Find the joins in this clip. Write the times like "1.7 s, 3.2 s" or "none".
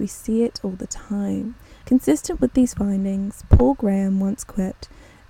1.8 s